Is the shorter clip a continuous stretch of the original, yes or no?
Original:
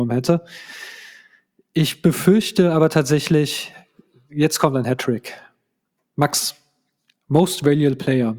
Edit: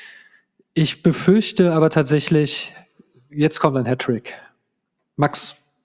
yes